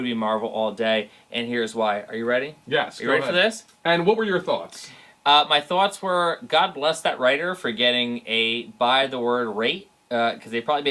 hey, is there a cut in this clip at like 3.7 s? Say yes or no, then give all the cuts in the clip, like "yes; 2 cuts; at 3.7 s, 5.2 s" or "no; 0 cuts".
yes; 1 cut; at 3.7 s